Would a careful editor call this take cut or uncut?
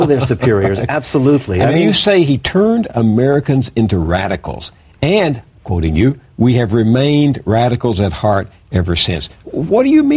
uncut